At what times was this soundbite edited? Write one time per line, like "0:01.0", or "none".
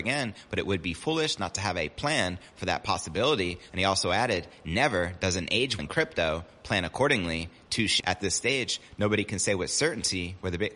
0:03.7
0:05.8
0:08.0